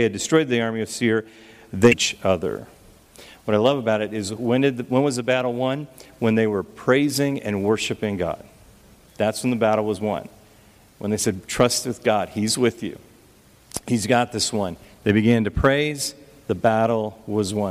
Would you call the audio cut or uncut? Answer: uncut